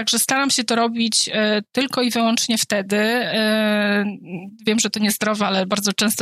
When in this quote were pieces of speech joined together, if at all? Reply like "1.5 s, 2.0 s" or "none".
none